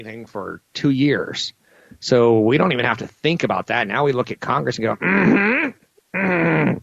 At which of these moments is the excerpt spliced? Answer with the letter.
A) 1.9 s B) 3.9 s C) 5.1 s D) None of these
D